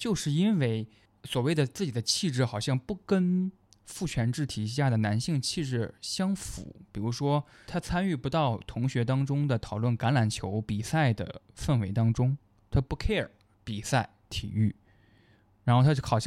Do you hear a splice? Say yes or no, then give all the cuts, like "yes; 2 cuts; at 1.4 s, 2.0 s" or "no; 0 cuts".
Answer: no; 0 cuts